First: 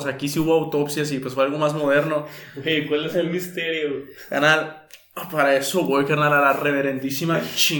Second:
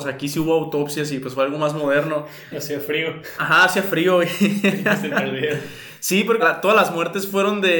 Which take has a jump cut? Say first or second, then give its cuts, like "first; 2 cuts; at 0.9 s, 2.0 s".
second; 2 cuts; at 2.5 s, 6.4 s